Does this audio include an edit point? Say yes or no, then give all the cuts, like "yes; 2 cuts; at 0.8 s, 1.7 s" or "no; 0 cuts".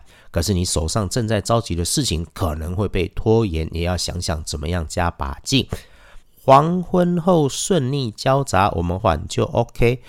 yes; 2 cuts; at 6.2 s, 9.0 s